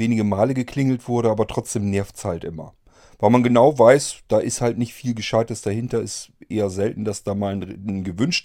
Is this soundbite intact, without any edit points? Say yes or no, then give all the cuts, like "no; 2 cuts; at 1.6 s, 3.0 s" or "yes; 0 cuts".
yes; 0 cuts